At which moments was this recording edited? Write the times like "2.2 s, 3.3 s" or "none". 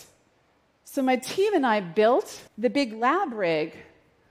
2.5 s